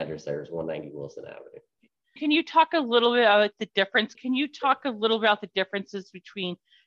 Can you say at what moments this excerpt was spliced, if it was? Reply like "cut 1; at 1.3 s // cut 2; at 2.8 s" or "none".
cut 1; at 2.2 s // cut 2; at 4.1 s